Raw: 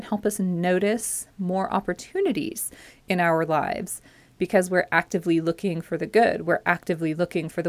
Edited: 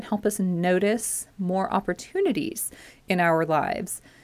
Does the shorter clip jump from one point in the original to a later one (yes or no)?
no